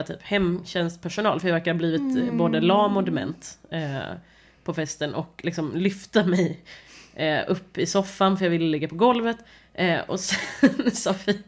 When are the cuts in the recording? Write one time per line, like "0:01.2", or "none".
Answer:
none